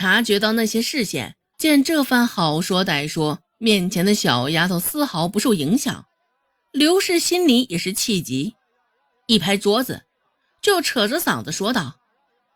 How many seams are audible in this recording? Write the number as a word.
one